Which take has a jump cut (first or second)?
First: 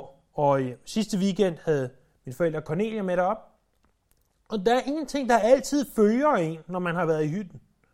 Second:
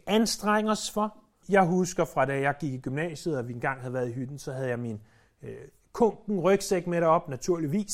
second